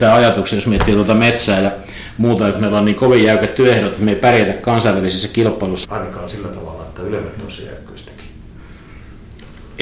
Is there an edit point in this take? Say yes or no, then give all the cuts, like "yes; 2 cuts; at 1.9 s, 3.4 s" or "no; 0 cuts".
yes; 2 cuts; at 2.5 s, 5.8 s